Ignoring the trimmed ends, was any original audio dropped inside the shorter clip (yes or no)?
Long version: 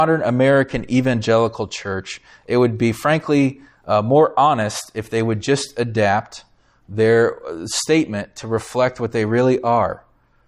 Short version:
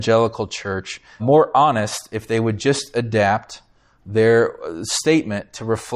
yes